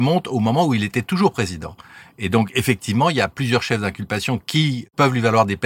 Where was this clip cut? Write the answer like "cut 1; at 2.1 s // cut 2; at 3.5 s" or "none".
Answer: none